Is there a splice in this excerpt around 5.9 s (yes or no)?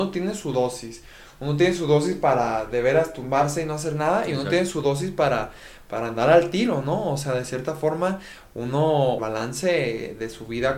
no